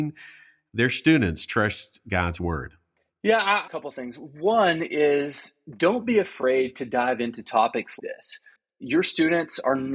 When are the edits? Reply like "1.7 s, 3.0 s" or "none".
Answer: 3.6 s, 8.0 s